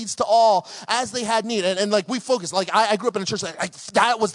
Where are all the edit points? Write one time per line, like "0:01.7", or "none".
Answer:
none

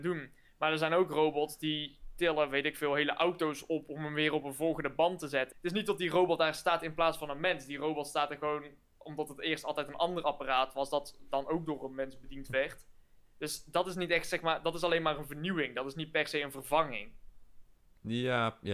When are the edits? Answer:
0:05.5

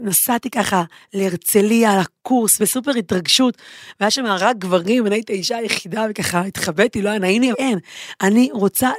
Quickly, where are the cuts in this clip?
0:07.5

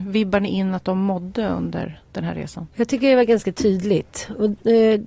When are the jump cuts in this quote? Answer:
0:02.7

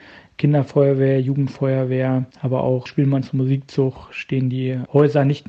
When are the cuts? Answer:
0:02.3

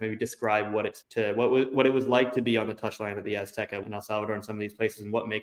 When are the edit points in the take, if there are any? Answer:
0:01.0
0:03.8

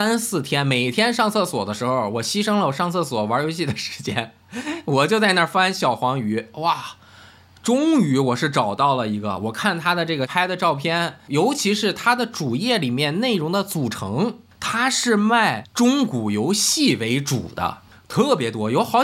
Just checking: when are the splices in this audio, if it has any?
none

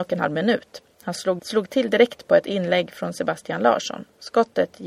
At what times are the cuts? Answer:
0:01.4

